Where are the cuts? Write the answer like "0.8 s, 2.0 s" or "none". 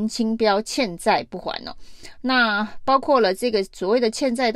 none